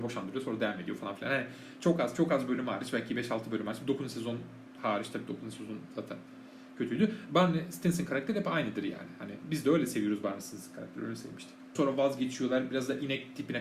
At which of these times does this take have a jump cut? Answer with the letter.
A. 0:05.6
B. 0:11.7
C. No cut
B